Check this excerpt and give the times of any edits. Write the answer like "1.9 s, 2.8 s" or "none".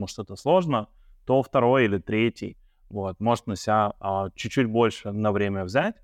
none